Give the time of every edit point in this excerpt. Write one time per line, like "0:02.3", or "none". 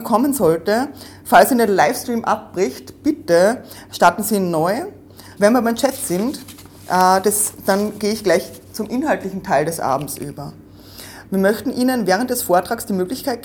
0:05.4
0:11.2